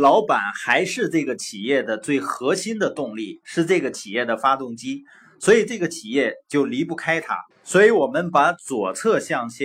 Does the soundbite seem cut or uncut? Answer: cut